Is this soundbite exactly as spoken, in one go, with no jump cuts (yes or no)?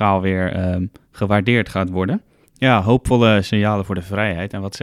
no